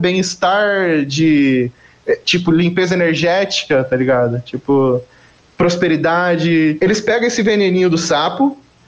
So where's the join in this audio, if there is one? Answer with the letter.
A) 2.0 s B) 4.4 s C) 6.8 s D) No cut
C